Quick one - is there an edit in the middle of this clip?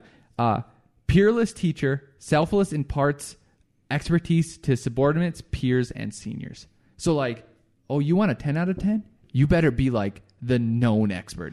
no; 0 cuts

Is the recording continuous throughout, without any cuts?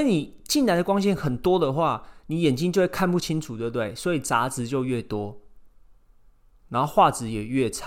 yes; 0 cuts

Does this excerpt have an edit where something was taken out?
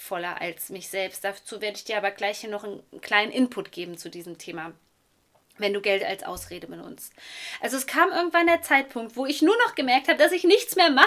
no; 0 cuts

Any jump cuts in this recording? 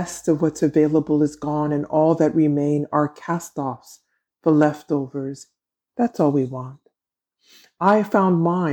yes; 1 cut; at 5.9 s

